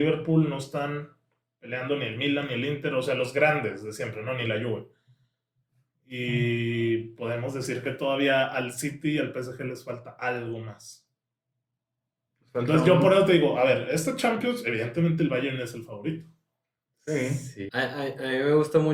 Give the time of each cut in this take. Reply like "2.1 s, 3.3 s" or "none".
17.7 s

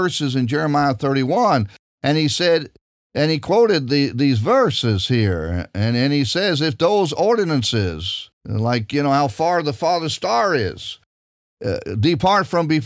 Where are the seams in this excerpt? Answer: 8.4 s

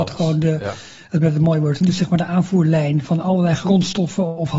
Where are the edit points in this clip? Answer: 1.8 s, 3.0 s

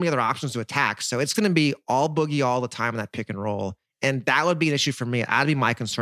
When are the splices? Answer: none

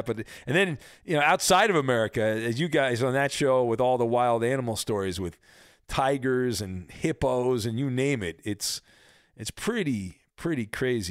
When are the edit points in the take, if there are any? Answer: none

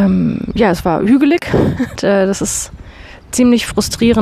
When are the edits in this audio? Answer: 2.0 s

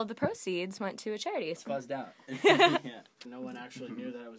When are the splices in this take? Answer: 1.6 s, 3.2 s

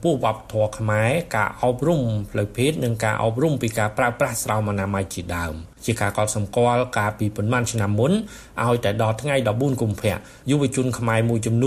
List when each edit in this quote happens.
5.8 s

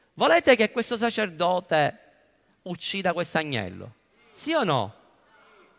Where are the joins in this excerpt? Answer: none

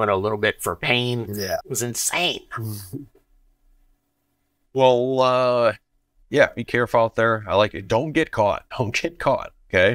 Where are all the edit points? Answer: 1.6 s, 8.7 s

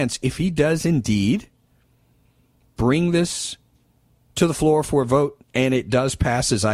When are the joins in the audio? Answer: 5.4 s

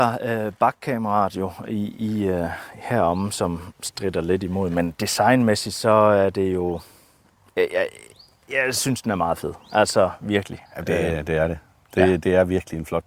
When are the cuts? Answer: 10.7 s

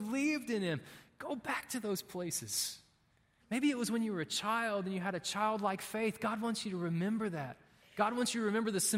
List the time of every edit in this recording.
3.4 s

